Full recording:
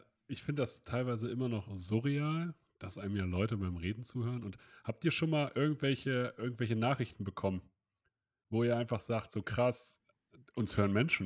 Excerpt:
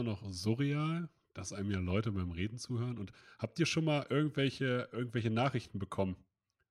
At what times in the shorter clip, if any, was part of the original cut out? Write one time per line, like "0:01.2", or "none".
none